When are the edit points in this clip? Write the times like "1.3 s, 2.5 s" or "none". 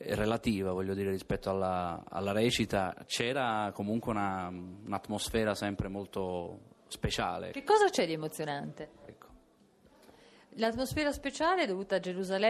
7.5 s, 9.1 s